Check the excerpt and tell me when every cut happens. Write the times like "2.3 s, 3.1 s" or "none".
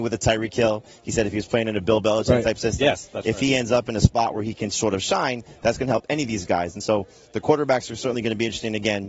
none